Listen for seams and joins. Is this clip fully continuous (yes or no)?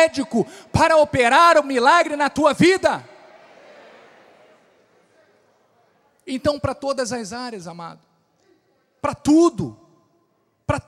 yes